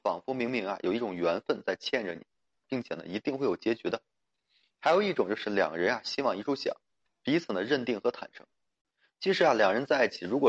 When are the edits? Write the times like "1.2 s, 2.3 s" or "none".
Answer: 2.6 s

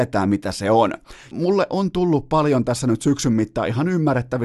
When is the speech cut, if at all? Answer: 1.3 s

